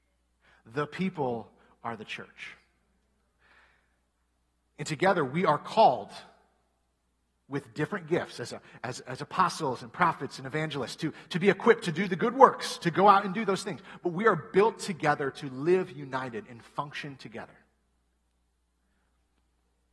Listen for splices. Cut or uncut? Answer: uncut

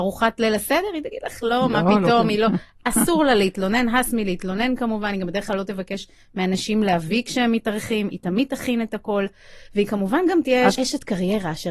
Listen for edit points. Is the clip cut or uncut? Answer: cut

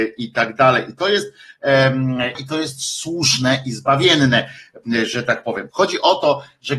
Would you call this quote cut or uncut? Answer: cut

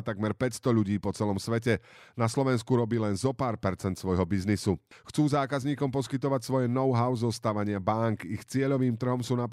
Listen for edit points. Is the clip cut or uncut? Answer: cut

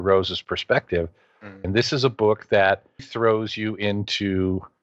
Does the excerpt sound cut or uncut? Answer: cut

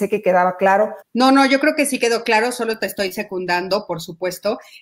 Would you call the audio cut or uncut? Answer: cut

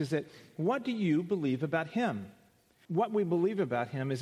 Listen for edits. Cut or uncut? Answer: cut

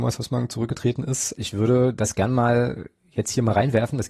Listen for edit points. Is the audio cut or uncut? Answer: cut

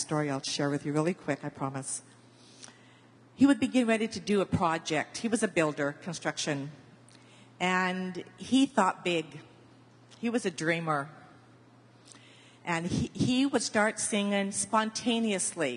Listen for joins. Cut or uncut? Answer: cut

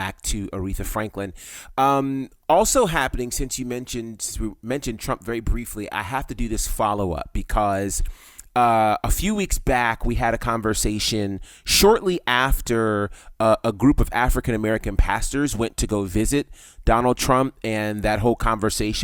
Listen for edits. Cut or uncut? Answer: uncut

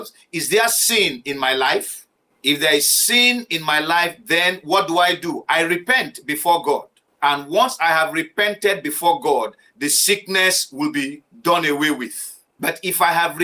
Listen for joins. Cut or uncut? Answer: uncut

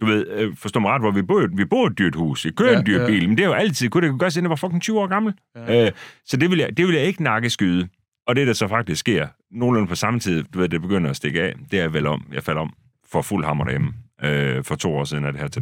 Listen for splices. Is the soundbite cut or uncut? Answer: cut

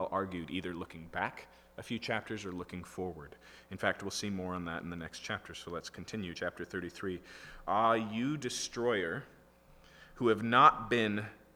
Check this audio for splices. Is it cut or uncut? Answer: uncut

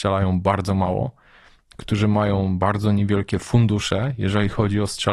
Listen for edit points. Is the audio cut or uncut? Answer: uncut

